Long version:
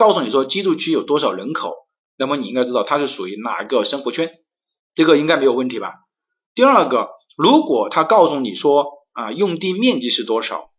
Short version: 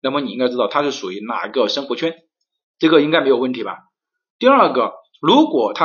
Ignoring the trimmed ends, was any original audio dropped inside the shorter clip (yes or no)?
no